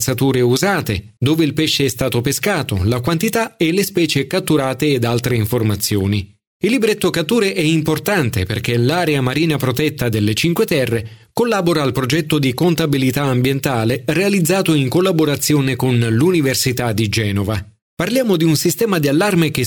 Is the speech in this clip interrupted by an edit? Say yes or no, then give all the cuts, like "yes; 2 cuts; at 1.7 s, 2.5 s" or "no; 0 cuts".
yes; 2 cuts; at 1.2 s, 17.8 s